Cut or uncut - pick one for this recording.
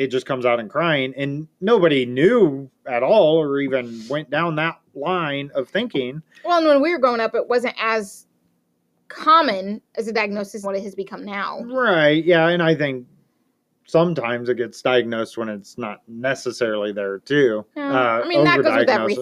cut